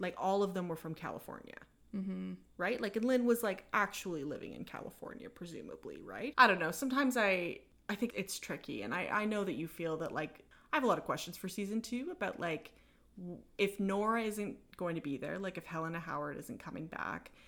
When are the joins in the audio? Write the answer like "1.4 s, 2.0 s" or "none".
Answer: 6.3 s, 8.1 s